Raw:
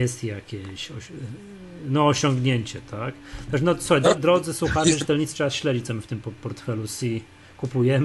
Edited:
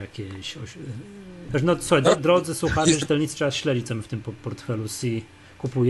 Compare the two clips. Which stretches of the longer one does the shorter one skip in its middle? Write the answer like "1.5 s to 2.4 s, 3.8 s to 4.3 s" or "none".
1.8 s to 3.5 s